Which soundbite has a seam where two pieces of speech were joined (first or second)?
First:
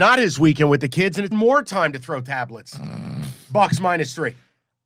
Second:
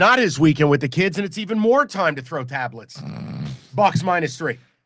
first